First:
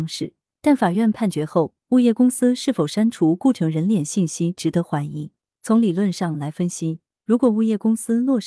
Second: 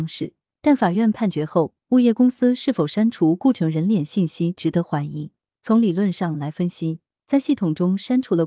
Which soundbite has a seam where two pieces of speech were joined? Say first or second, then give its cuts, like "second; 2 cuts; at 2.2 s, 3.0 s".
second; 1 cut; at 7.2 s